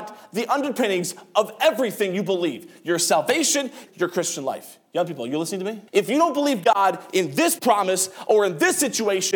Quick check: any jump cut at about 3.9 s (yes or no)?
yes